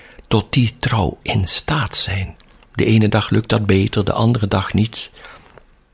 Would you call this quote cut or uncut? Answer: cut